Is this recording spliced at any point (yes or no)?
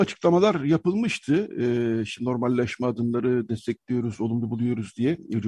no